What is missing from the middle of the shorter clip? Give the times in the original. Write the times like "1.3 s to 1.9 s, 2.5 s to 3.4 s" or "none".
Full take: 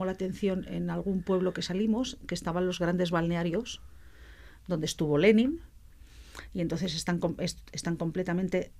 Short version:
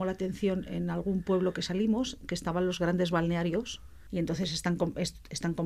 4.1 s to 6.5 s